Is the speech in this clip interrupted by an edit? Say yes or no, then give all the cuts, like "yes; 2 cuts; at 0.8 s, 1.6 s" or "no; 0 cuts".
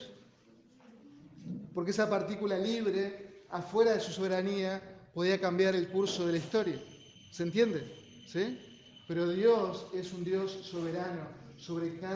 no; 0 cuts